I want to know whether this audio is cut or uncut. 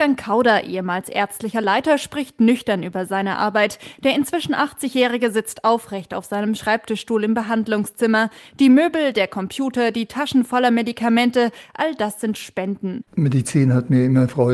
cut